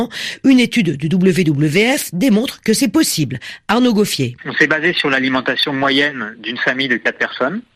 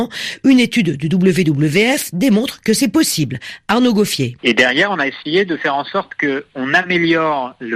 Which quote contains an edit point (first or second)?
second